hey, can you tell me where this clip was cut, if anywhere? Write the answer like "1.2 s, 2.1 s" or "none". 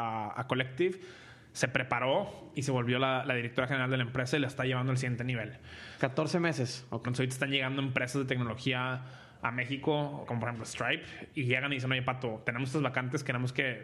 6.0 s, 7.0 s, 10.3 s